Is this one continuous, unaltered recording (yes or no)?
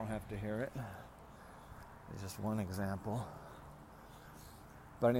yes